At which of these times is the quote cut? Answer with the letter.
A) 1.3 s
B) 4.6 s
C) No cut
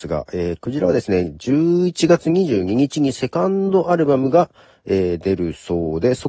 C